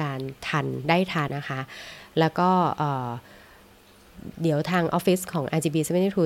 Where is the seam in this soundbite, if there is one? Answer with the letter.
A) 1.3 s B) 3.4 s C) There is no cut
A